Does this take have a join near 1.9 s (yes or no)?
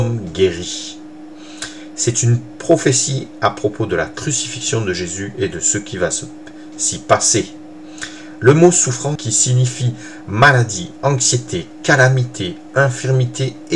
no